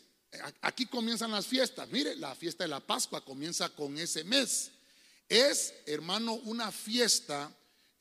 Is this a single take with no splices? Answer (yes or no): yes